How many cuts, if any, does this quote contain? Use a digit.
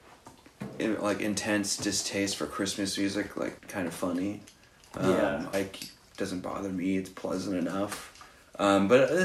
2